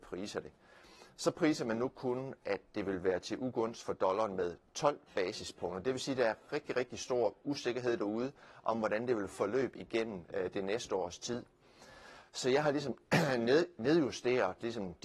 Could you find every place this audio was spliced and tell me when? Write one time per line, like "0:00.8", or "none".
none